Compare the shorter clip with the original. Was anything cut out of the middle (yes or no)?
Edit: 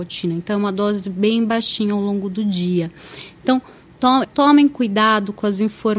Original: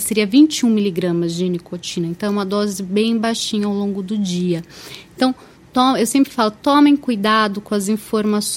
yes